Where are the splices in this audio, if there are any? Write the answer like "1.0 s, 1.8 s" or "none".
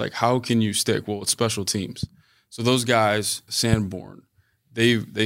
3.5 s